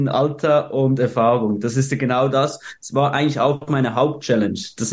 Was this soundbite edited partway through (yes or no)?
no